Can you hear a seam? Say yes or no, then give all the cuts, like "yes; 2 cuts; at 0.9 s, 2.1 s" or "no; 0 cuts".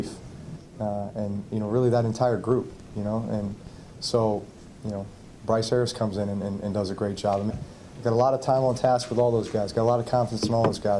yes; 1 cut; at 7.5 s